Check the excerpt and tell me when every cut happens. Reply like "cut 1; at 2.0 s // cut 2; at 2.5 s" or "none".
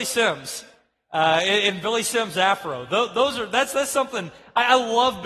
none